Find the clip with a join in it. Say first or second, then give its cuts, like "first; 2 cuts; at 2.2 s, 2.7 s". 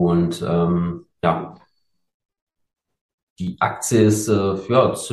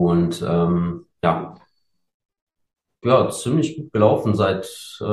second; 1 cut; at 3.0 s